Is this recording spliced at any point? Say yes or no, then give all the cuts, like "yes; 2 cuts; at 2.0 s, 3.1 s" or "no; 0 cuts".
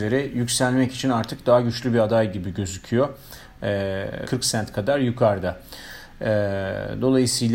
yes; 1 cut; at 4.2 s